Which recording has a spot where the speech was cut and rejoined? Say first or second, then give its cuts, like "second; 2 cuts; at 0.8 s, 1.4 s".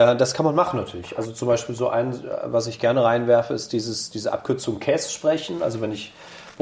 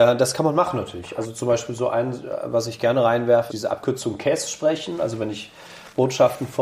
second; 1 cut; at 3.5 s